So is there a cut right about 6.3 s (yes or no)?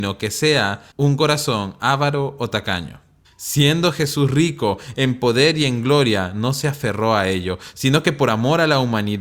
no